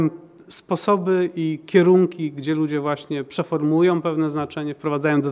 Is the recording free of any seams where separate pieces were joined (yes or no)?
yes